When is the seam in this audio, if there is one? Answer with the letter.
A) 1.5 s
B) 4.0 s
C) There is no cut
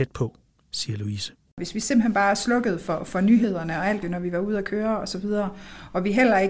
B